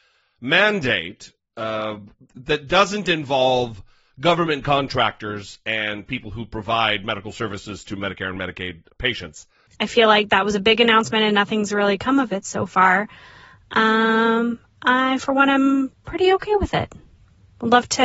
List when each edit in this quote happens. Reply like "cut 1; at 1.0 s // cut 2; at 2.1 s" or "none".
cut 1; at 9.7 s